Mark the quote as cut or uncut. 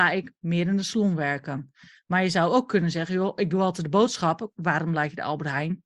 cut